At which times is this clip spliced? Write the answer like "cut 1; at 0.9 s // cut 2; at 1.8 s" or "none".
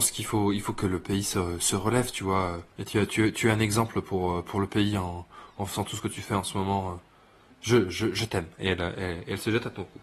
cut 1; at 2.7 s